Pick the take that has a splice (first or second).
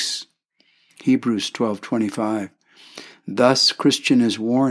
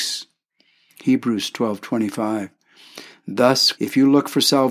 second